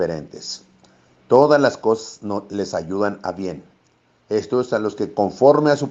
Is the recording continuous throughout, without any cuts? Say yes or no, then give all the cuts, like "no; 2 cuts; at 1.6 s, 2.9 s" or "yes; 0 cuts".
yes; 0 cuts